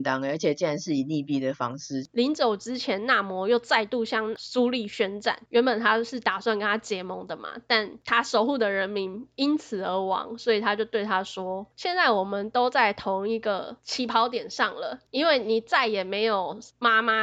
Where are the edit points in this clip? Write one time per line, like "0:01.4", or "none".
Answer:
0:02.1